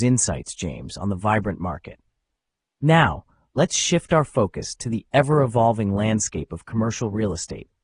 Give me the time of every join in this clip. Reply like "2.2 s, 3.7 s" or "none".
none